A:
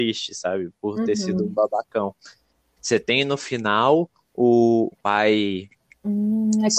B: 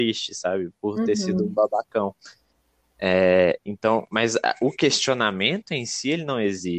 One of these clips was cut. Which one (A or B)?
A